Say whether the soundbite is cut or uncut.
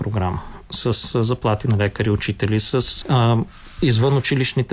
cut